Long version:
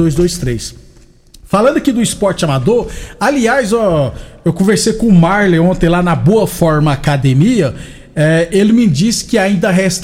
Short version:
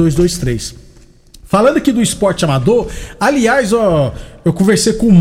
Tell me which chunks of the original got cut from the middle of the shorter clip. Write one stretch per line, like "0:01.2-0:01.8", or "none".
none